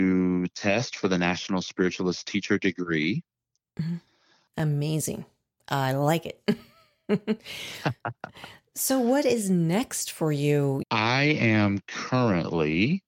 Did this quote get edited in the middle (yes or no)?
yes